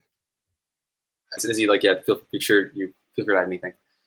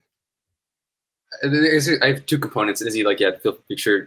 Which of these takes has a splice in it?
first; 1 cut; at 1.4 s

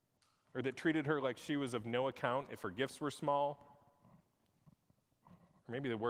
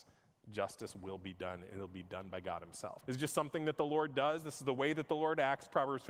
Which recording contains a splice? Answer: second; 1 cut; at 3.0 s

